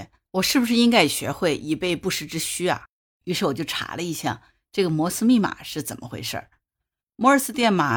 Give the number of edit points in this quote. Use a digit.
1